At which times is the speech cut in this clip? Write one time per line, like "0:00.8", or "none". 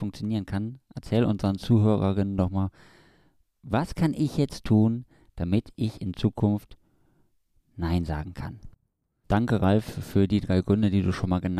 0:09.2